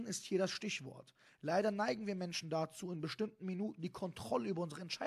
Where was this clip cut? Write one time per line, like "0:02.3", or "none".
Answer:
none

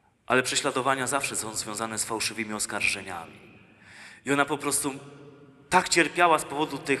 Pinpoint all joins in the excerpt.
none

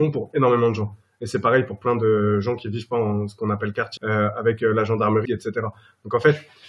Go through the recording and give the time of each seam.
0:04.0
0:05.2

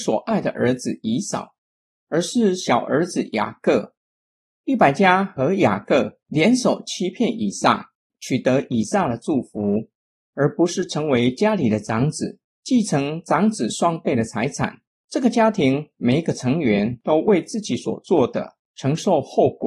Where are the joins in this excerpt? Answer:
0:10.2

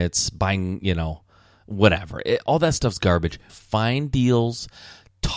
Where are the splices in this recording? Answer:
0:03.5

